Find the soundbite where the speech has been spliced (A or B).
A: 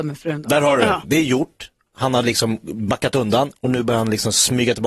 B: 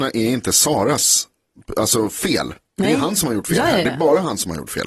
A